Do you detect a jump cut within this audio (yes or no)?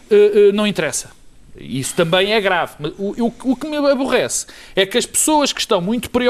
no